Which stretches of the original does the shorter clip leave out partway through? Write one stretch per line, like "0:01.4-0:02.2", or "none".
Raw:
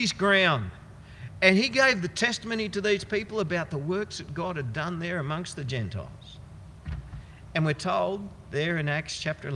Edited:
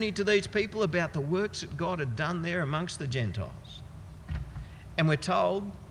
none